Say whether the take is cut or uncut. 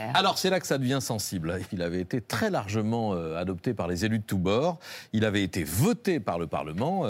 cut